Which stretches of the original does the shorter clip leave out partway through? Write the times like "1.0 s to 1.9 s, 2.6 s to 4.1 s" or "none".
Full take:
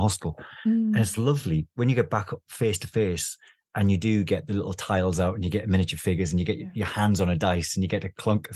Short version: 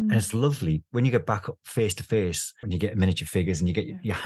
3.5 s to 5.3 s